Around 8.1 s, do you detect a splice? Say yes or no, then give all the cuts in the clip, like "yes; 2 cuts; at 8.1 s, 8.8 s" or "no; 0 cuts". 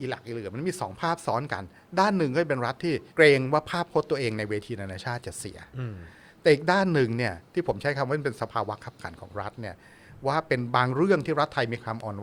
no; 1 cut; at 3.1 s